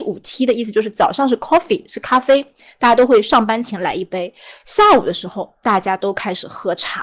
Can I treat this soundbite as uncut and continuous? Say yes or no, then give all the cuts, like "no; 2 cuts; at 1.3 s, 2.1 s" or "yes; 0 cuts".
yes; 0 cuts